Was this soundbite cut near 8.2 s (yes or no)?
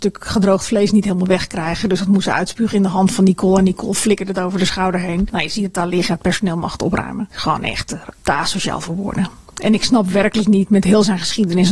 yes